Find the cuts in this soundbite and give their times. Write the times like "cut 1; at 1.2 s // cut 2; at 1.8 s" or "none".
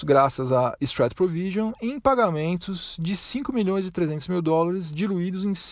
none